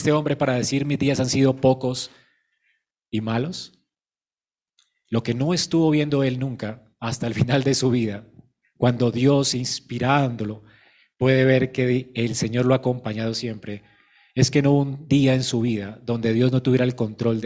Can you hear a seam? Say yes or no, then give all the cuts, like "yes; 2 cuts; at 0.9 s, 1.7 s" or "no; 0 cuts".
no; 0 cuts